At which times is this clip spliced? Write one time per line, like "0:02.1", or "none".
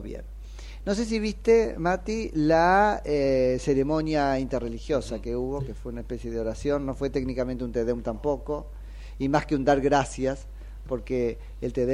none